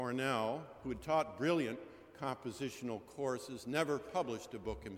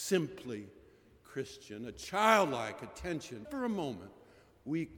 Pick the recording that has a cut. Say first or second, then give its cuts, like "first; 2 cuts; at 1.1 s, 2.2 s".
second; 1 cut; at 3.5 s